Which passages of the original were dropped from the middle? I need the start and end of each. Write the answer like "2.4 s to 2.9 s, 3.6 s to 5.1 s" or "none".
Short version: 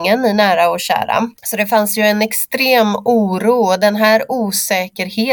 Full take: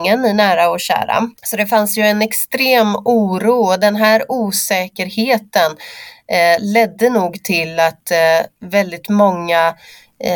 none